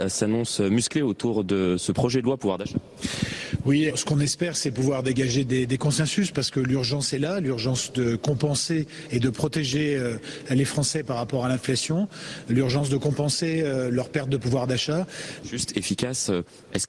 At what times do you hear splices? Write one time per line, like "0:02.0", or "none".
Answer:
0:03.9
0:15.4